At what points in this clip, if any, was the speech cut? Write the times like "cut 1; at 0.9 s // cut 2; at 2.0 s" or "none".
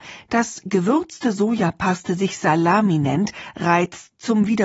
none